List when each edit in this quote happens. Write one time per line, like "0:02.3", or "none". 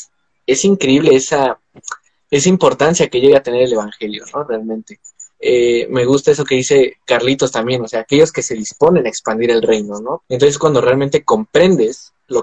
0:02.2
0:05.3
0:10.2

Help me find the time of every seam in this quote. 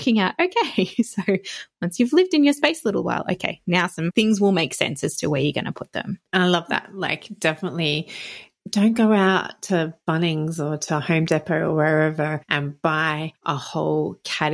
0:06.3

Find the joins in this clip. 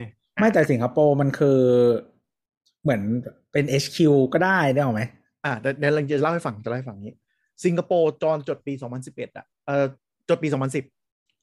none

